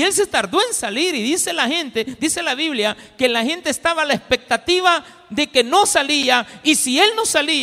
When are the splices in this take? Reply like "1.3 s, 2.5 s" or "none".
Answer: none

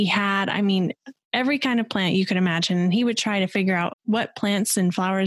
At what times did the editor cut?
3.9 s

